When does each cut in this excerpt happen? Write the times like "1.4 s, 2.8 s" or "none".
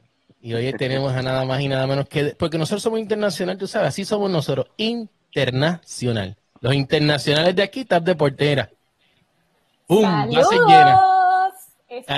none